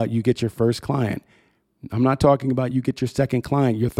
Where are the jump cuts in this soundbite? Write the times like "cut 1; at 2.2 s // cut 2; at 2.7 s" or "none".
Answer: none